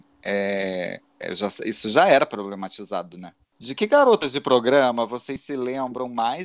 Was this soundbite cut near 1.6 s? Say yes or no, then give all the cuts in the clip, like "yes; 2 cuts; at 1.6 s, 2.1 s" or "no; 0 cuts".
no; 1 cut; at 3.4 s